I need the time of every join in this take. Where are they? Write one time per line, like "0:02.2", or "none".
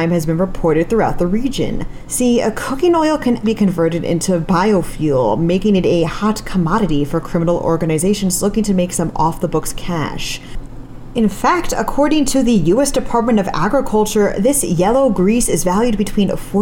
0:03.4